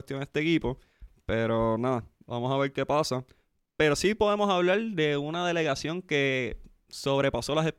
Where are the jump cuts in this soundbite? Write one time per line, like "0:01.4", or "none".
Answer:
none